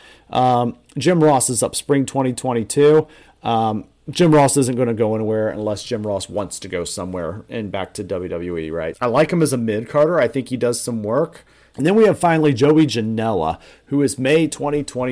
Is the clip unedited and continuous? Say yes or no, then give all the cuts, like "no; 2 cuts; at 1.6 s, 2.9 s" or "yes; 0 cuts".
no; 2 cuts; at 8.9 s, 11.7 s